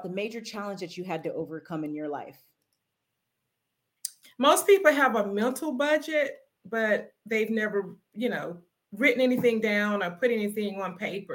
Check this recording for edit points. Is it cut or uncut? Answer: cut